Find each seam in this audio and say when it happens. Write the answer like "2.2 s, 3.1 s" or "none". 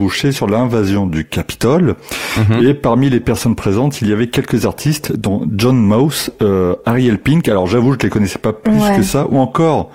none